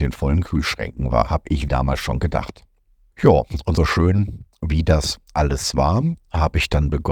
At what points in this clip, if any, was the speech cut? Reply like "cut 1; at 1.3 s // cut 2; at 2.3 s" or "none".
cut 1; at 1.7 s // cut 2; at 3.8 s